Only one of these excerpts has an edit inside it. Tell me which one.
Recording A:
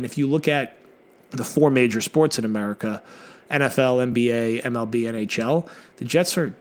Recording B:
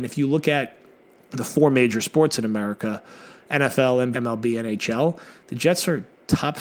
B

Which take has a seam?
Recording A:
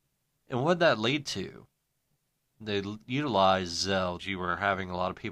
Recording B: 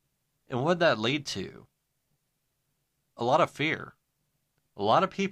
A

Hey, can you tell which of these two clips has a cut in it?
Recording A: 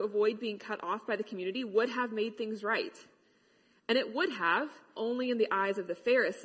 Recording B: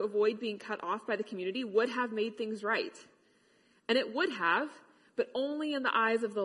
A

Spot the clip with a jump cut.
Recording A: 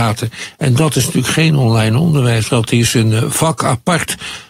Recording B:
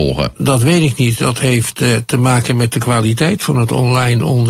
A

